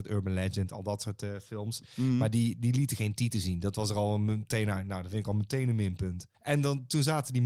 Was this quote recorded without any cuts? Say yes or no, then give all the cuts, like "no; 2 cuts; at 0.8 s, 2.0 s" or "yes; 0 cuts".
yes; 0 cuts